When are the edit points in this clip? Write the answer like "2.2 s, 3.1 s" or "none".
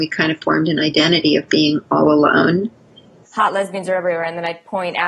3.2 s